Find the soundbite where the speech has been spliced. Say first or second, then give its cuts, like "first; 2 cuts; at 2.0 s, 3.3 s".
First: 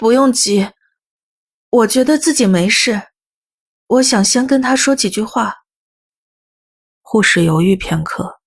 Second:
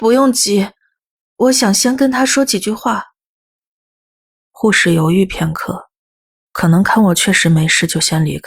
second; 1 cut; at 1.2 s